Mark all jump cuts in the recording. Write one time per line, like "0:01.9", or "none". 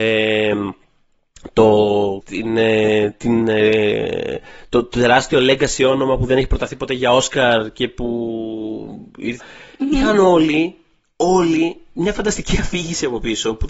0:02.2
0:09.4